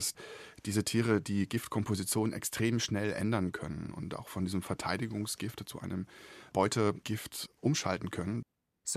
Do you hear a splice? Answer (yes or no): no